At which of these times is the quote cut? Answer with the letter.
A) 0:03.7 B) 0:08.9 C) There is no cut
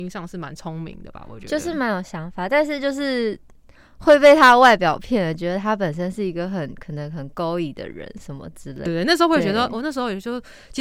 B